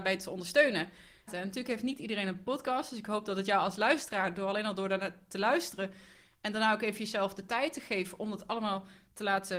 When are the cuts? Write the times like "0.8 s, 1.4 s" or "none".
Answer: 1.3 s